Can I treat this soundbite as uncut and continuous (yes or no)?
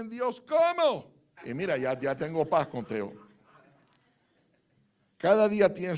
no